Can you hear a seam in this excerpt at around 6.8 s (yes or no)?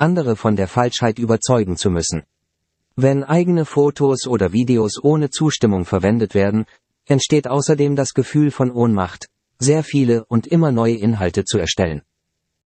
no